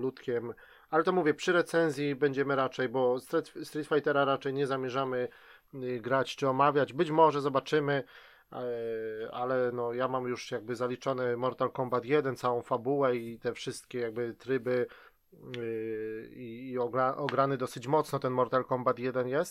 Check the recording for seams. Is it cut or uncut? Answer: uncut